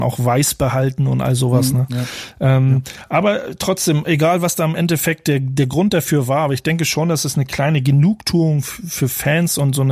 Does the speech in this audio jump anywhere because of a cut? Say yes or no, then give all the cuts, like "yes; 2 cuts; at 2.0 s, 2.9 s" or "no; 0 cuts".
no; 0 cuts